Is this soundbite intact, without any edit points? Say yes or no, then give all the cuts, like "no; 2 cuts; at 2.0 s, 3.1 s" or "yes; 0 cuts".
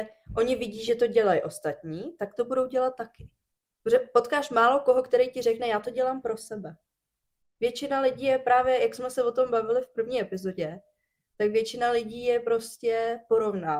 yes; 0 cuts